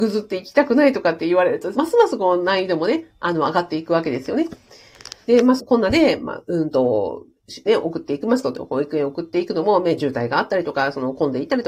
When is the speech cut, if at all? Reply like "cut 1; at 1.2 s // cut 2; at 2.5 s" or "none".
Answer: cut 1; at 1.7 s // cut 2; at 5.6 s // cut 3; at 7.7 s